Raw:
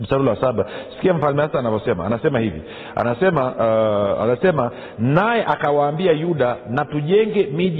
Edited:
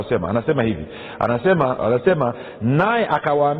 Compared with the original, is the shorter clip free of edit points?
no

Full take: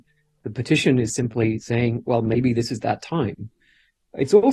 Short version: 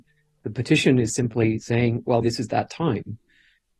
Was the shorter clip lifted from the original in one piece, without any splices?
no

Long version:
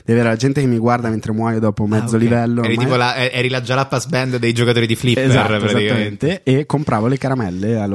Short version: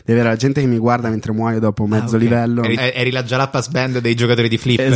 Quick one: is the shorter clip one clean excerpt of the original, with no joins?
no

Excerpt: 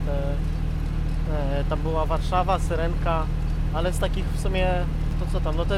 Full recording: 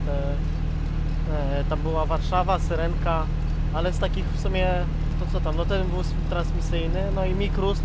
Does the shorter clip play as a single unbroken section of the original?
yes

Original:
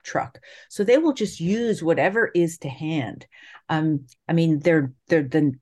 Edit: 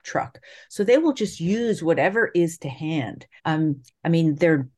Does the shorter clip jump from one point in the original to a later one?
yes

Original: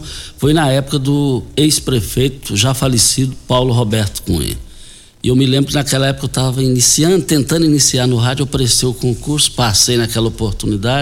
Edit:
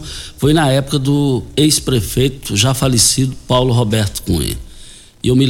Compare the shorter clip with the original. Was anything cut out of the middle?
no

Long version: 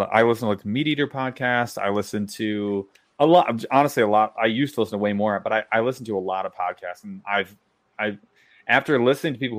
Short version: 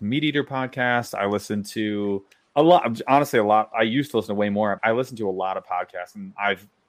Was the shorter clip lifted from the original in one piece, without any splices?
no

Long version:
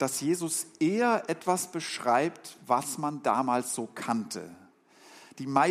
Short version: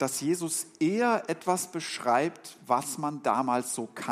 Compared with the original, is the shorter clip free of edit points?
yes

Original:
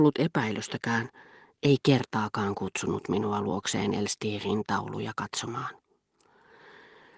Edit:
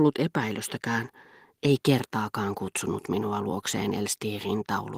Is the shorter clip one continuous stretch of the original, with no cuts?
yes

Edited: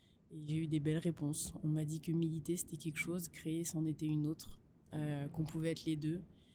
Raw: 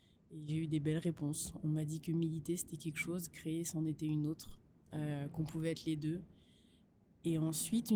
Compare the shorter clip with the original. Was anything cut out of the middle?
no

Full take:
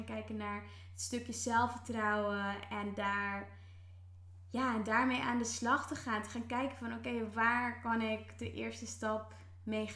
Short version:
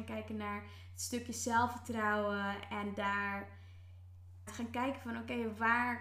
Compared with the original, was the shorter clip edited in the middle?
yes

